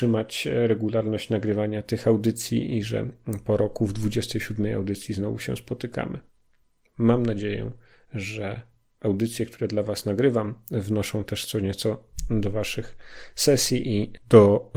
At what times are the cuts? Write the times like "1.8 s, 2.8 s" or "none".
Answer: 6.8 s